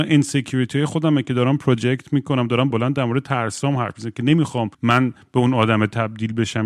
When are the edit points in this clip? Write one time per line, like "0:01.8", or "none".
0:02.7
0:04.7